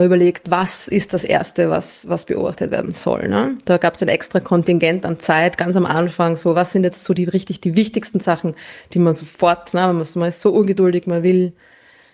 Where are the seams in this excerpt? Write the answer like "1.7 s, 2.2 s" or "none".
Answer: none

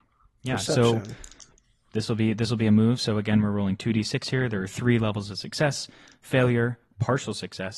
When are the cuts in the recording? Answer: none

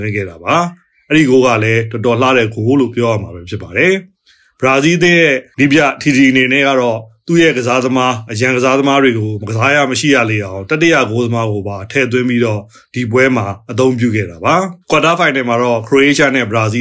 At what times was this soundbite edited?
14.8 s

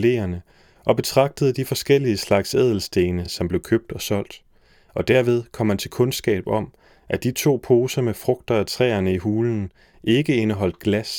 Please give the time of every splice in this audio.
none

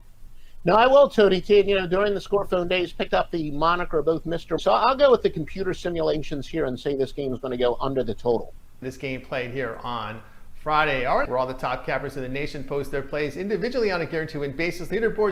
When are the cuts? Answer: 4.6 s, 8.8 s, 11.3 s

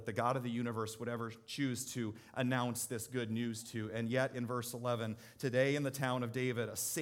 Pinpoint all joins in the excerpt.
none

